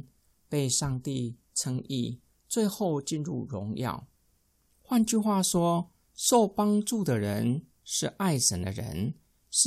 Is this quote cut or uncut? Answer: cut